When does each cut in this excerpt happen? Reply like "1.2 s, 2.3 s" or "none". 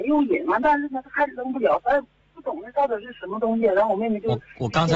none